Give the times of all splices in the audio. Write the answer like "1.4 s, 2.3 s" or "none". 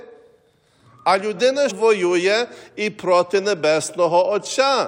1.7 s